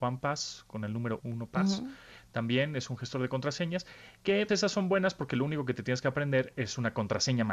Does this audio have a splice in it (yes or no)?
yes